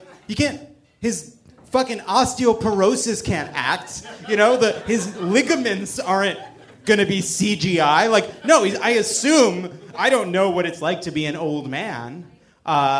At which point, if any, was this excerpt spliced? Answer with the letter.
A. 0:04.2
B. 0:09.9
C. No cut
B